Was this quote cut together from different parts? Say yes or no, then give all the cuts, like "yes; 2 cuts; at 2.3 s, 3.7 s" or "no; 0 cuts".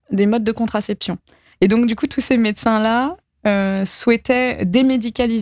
no; 0 cuts